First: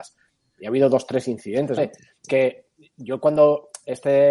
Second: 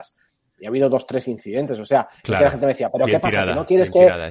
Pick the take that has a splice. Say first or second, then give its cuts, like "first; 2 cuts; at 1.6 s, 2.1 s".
first; 1 cut; at 1.8 s